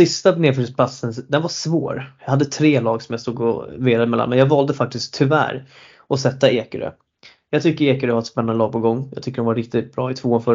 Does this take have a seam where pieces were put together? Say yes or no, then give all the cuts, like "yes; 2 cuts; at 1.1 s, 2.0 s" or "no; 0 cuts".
no; 0 cuts